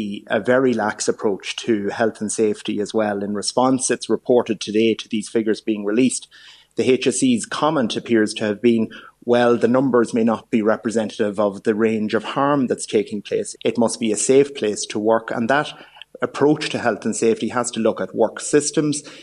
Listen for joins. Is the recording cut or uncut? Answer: cut